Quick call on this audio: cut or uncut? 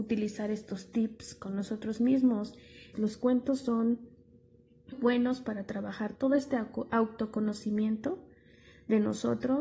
cut